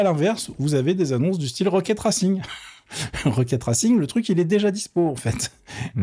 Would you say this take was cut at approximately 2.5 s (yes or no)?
no